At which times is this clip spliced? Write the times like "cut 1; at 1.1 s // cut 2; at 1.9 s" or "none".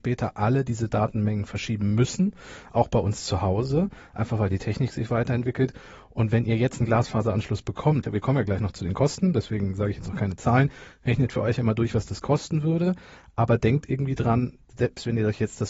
cut 1; at 8.0 s